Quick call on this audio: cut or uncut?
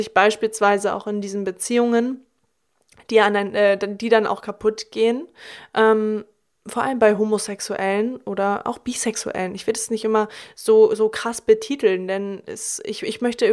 uncut